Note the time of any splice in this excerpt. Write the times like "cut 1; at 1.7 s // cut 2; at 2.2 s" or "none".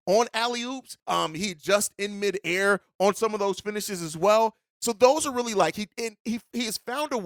cut 1; at 1.0 s